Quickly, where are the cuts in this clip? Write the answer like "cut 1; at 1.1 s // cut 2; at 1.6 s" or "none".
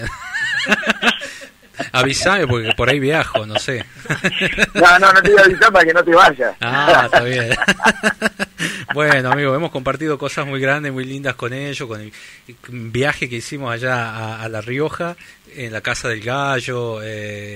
none